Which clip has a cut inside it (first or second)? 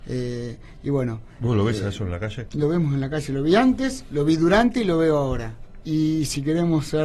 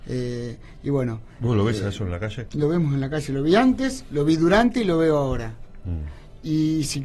first